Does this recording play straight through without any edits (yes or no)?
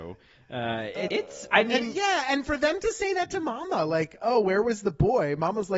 no